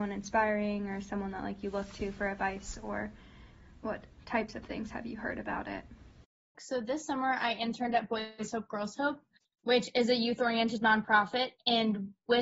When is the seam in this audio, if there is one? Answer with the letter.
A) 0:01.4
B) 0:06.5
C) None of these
B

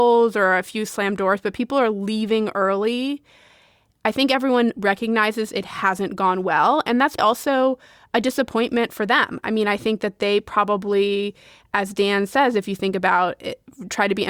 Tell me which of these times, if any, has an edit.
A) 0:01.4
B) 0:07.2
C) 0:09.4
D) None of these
B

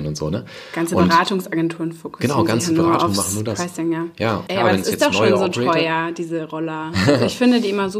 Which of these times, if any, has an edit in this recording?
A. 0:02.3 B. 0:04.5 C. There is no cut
B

